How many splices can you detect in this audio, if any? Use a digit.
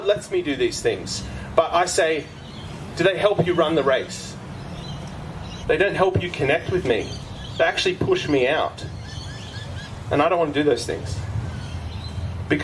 1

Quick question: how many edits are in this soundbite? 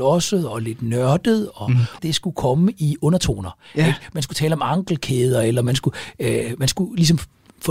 1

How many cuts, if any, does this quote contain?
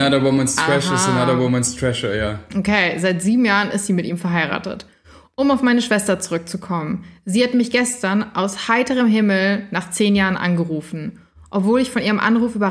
0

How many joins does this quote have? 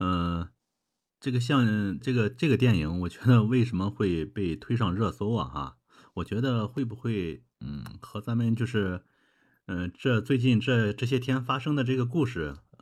1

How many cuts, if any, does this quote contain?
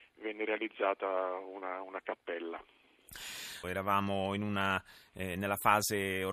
1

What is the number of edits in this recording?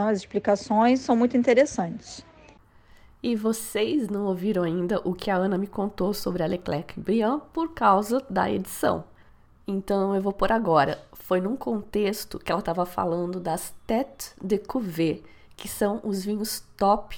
0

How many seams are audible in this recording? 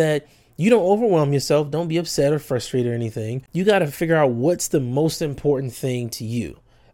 0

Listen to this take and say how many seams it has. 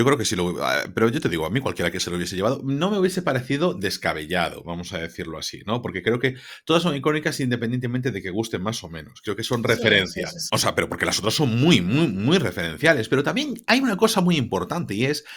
1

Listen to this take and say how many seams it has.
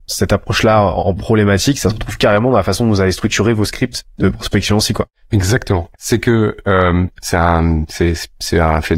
2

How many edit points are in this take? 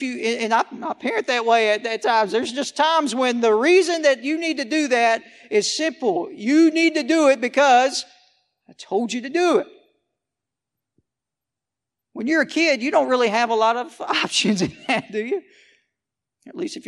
0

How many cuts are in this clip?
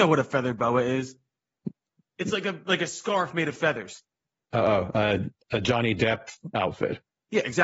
0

